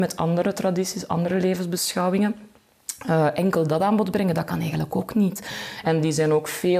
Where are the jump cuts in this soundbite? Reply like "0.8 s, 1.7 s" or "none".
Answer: 5.8 s